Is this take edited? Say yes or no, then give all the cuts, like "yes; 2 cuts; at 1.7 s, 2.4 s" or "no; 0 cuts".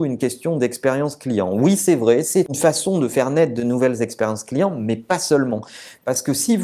no; 0 cuts